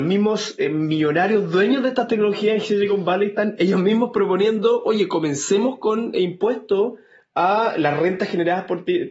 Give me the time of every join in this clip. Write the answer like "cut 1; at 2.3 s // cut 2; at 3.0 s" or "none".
none

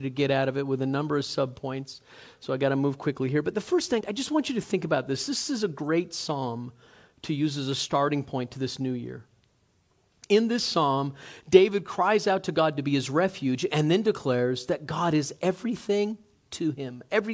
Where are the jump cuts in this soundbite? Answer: cut 1; at 4.0 s

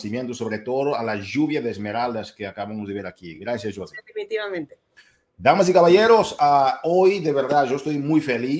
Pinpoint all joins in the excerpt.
none

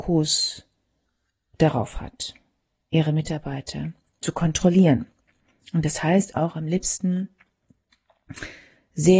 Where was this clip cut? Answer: none

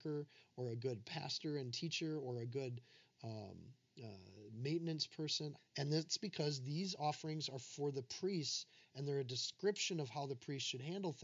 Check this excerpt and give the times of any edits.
cut 1; at 5.6 s

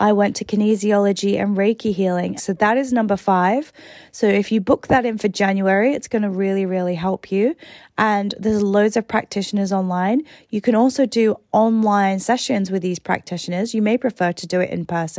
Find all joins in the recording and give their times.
cut 1; at 2.4 s

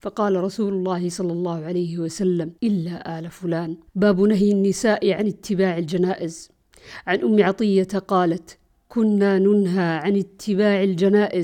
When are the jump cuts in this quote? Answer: cut 1; at 2.6 s // cut 2; at 3.9 s

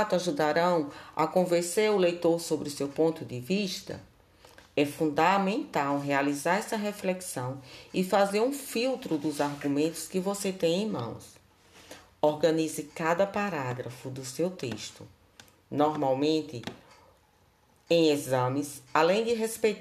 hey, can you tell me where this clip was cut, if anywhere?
none

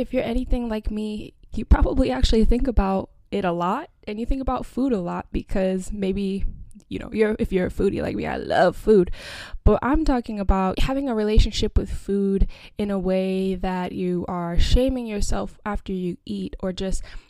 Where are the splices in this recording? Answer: cut 1; at 10.7 s

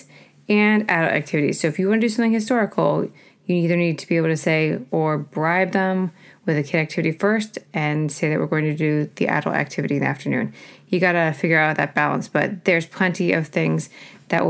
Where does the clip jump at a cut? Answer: cut 1; at 4.9 s

